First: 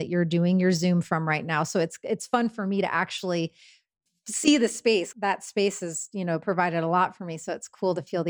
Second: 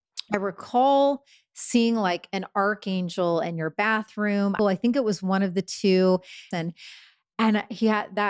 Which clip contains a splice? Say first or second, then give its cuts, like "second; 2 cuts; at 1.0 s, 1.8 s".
second; 2 cuts; at 4.6 s, 6.5 s